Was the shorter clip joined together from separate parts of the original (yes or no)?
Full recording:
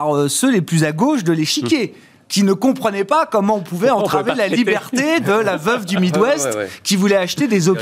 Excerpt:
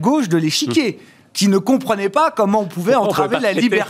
no